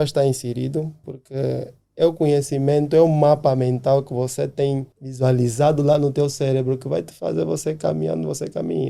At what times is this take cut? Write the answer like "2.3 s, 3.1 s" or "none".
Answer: 1.0 s, 4.9 s